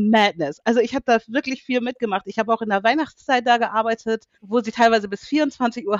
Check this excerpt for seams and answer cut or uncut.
cut